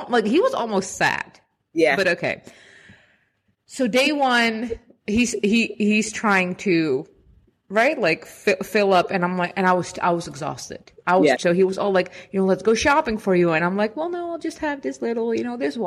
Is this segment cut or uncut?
cut